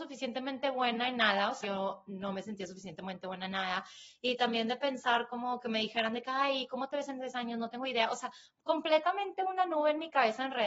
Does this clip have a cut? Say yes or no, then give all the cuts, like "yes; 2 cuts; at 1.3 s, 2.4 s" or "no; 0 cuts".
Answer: yes; 1 cut; at 1.6 s